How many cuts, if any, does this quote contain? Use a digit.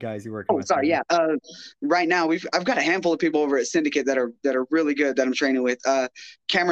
0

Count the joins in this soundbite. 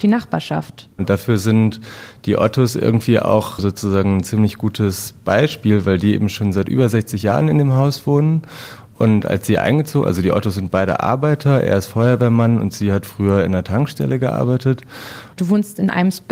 2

